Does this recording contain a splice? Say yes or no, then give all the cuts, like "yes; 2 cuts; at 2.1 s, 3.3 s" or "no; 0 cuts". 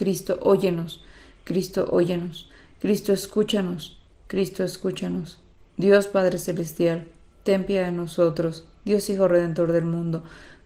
no; 0 cuts